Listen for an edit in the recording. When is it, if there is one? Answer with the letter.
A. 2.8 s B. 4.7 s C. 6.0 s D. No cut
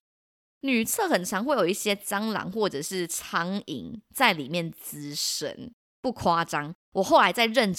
C